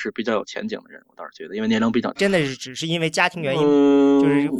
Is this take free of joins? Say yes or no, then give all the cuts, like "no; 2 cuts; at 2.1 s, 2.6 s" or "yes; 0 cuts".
no; 1 cut; at 2.2 s